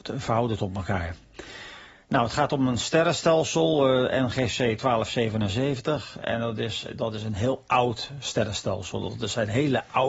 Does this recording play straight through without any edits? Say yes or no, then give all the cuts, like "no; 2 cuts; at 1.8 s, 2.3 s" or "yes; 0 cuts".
yes; 0 cuts